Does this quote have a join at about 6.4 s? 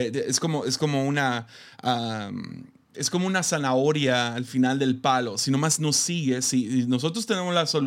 no; 0 cuts

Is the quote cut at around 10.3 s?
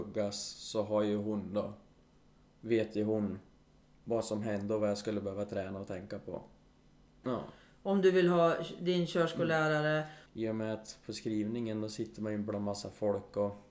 yes; 2 cuts; at 7.2 s, 10.3 s

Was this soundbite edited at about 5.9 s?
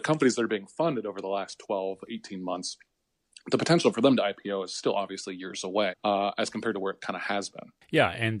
yes; 1 cut; at 5.9 s

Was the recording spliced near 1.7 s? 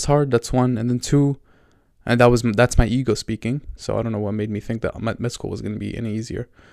no; 1 cut; at 3.8 s

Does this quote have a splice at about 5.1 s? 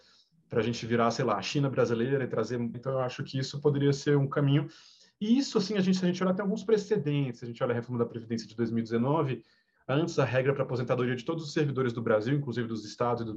no; 1 cut; at 2.7 s

